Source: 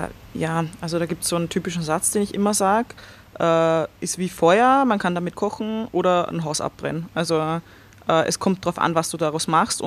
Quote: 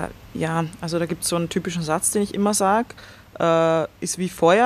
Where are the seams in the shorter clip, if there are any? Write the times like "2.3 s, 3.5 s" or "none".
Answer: none